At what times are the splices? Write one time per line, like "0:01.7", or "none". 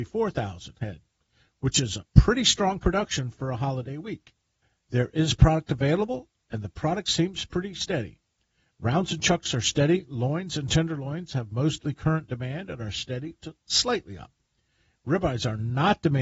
none